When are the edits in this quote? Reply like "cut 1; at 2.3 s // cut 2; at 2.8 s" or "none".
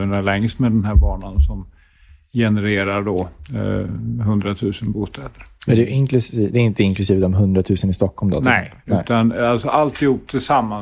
none